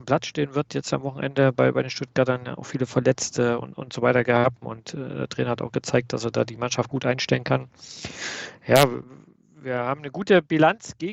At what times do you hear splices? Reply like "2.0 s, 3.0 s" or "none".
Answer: 4.6 s